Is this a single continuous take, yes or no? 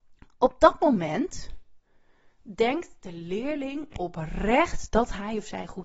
yes